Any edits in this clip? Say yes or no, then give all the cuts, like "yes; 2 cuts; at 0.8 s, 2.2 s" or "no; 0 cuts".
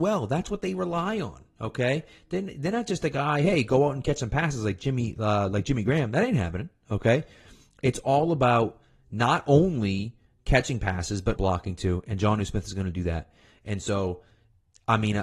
yes; 1 cut; at 11.4 s